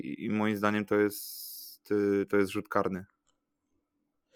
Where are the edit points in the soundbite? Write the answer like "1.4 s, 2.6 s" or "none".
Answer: none